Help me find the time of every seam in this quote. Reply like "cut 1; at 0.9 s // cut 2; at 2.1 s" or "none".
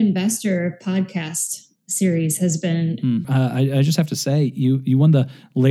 cut 1; at 3.2 s